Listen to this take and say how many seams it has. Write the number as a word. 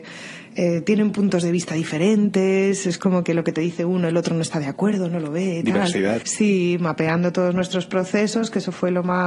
one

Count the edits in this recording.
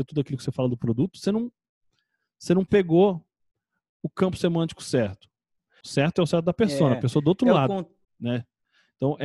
two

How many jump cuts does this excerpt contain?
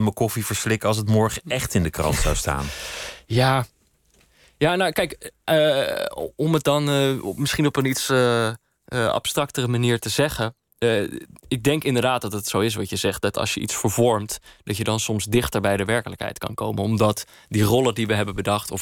zero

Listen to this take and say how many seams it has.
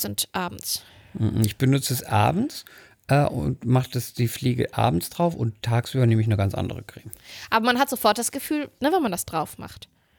one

